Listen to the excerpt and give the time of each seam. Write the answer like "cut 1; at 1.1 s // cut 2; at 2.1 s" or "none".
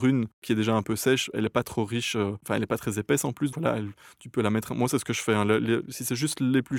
cut 1; at 3.5 s

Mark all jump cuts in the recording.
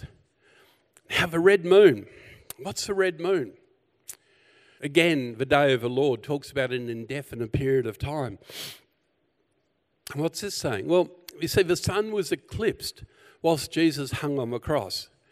cut 1; at 4.8 s

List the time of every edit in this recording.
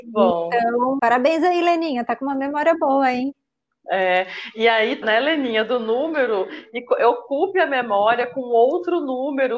cut 1; at 1.0 s // cut 2; at 5.0 s

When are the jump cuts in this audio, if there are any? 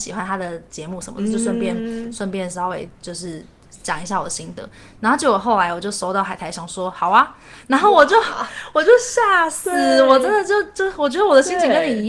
none

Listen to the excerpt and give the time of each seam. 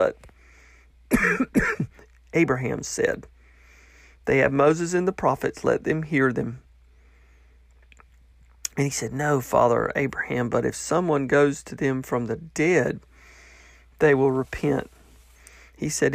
none

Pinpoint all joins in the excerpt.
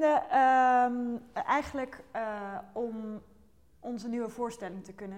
none

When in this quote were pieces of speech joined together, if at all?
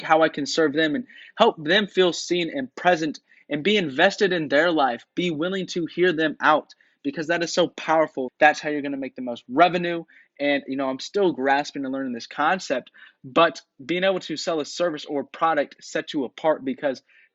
cut 1; at 8.3 s

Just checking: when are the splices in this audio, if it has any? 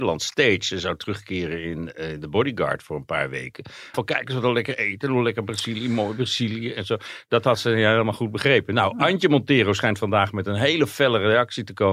cut 1; at 3.9 s

